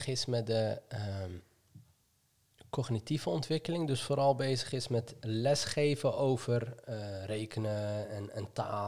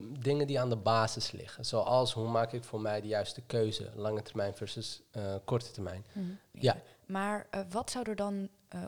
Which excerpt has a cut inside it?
second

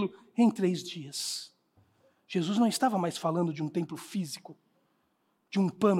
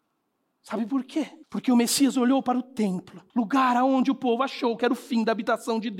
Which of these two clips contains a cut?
second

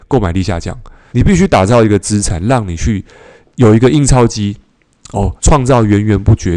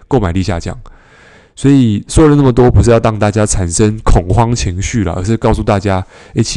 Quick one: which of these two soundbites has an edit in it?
first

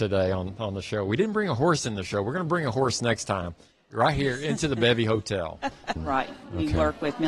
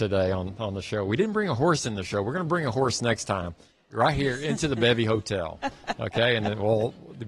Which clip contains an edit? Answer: first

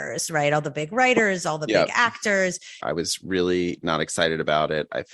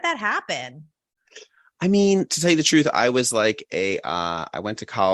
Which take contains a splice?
first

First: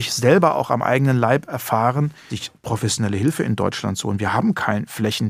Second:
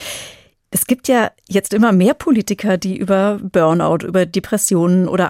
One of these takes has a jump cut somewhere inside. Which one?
first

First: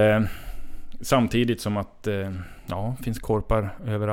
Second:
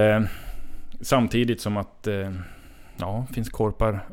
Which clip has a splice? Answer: first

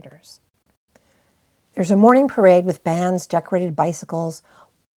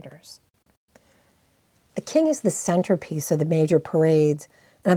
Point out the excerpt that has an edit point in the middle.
first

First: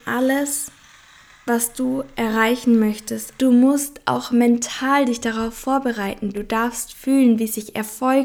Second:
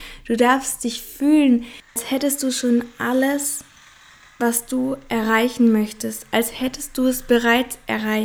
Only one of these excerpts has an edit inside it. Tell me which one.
first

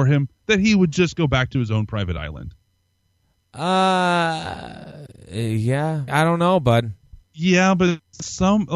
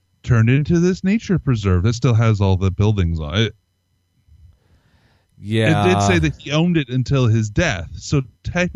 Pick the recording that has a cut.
first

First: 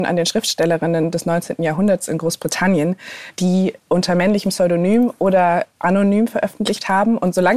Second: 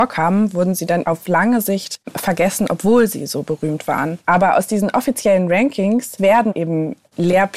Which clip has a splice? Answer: second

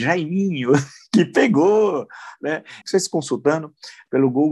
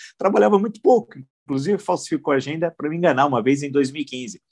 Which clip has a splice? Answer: first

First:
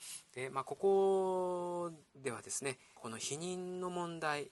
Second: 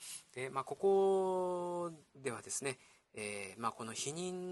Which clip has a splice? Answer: first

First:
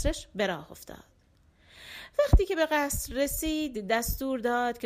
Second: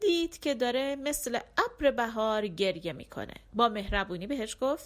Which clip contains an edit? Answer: second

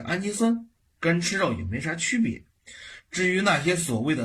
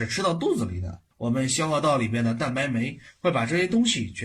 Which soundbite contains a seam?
second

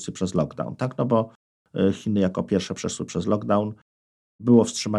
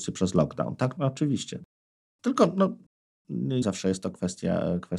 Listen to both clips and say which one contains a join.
second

